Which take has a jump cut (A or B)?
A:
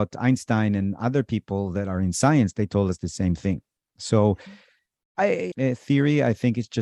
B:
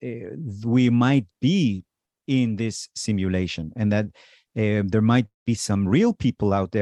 A